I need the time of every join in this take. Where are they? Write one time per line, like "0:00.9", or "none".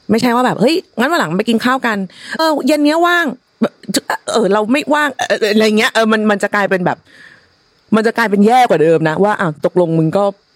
0:02.4